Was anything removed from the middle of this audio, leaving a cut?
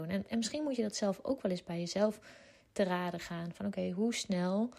no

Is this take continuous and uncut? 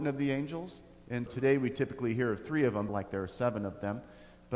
no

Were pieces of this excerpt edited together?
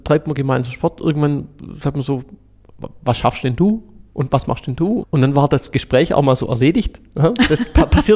yes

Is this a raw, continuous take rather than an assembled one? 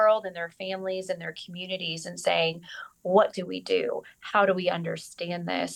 yes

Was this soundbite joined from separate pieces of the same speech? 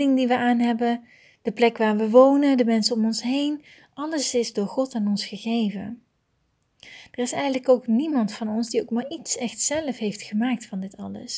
no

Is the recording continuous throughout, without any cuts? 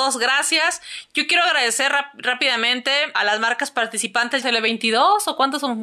no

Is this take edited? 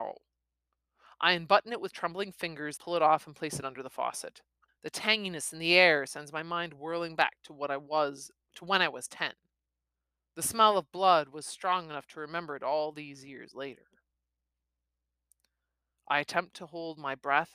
yes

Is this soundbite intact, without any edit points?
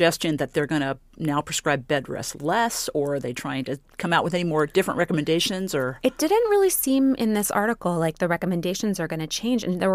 yes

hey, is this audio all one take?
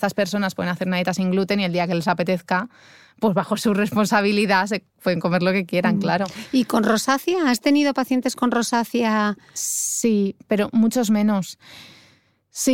yes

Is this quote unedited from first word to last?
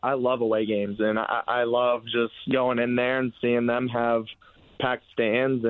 yes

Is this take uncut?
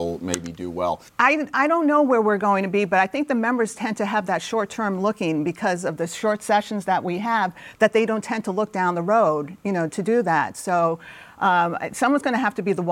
no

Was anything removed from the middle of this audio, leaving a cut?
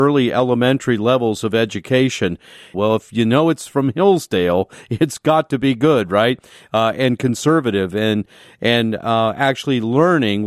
yes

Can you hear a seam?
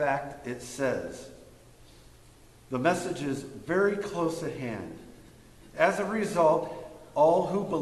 yes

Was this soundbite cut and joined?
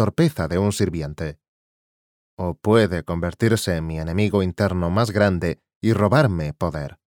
yes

